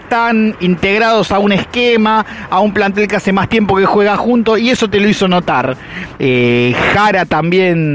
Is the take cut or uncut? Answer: cut